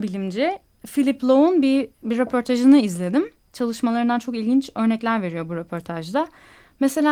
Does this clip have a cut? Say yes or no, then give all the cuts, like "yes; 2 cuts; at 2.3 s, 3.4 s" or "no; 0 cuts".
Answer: yes; 1 cut; at 1.9 s